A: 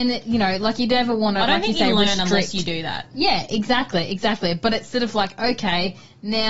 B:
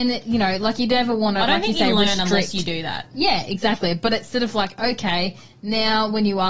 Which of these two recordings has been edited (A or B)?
B